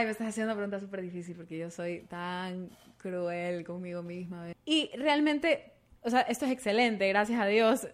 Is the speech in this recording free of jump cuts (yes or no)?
no